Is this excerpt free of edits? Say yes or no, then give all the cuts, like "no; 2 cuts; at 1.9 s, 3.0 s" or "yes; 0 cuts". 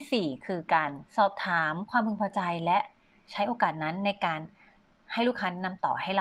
no; 1 cut; at 1.1 s